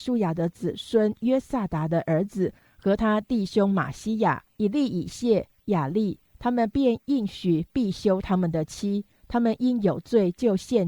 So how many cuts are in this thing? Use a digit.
1